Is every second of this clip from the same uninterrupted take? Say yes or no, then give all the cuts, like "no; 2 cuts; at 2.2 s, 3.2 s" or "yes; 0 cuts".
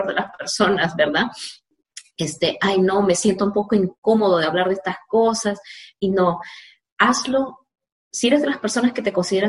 yes; 0 cuts